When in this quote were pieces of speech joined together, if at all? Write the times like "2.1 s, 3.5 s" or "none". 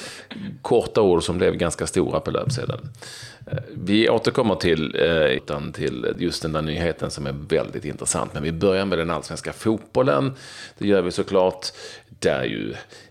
5.4 s

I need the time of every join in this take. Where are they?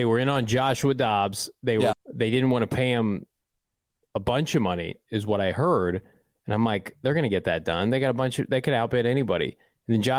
1.9 s

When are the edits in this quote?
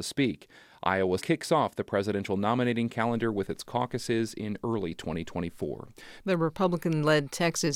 1.2 s, 6.2 s

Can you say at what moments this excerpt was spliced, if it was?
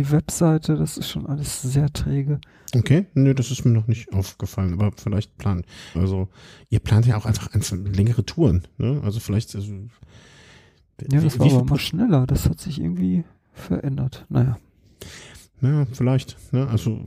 5.9 s

